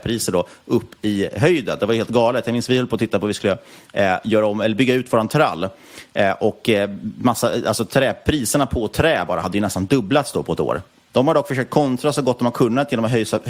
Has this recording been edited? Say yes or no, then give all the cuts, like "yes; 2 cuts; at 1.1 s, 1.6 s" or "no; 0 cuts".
yes; 1 cut; at 11.1 s